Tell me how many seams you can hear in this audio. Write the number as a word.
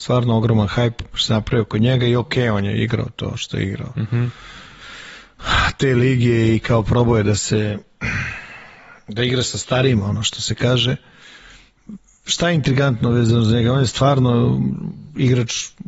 zero